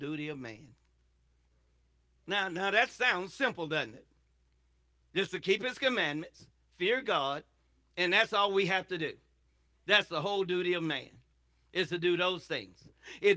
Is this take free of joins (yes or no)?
yes